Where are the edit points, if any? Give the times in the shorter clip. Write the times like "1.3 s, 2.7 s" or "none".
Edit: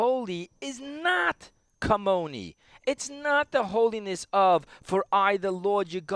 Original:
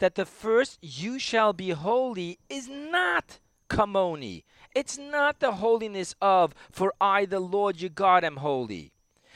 none